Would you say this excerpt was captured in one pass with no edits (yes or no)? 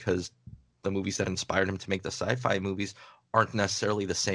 yes